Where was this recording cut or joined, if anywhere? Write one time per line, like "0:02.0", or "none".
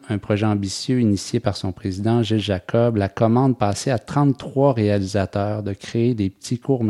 none